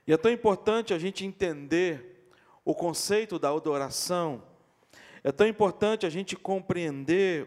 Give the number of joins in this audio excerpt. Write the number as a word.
zero